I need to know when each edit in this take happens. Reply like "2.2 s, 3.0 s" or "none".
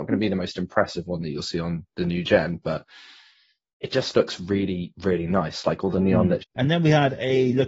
6.4 s